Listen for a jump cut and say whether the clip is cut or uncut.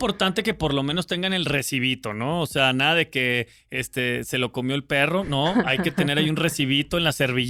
uncut